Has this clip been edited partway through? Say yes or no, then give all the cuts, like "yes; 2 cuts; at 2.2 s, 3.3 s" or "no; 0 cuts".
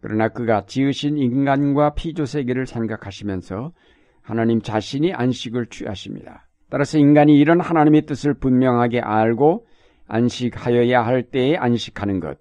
yes; 1 cut; at 6.6 s